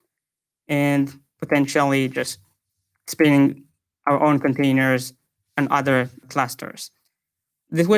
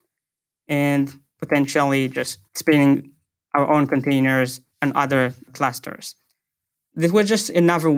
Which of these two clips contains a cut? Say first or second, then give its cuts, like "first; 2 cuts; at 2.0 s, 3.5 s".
second; 2 cuts; at 2.5 s, 4.7 s